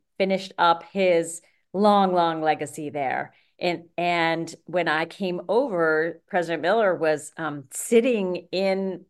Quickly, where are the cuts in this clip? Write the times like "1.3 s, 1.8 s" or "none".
6.3 s